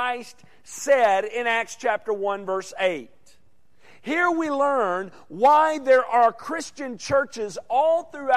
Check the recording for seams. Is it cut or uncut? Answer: uncut